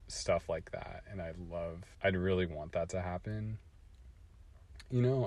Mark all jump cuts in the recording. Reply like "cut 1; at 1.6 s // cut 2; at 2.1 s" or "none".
cut 1; at 1.9 s